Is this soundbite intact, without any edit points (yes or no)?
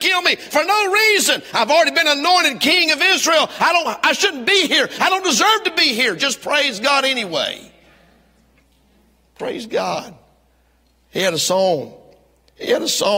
yes